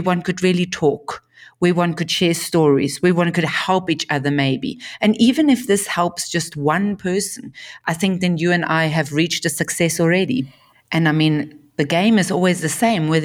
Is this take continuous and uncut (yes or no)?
no